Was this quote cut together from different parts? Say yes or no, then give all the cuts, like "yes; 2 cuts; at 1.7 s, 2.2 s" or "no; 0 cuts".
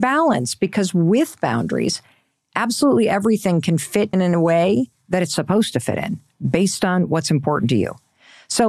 yes; 1 cut; at 4.1 s